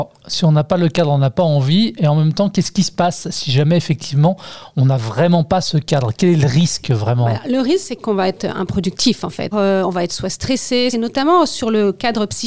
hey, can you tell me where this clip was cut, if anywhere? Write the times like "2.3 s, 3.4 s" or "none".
9.5 s, 10.9 s